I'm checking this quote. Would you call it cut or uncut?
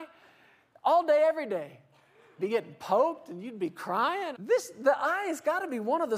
cut